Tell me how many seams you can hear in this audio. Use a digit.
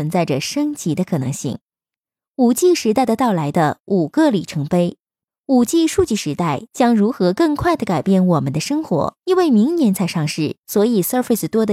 1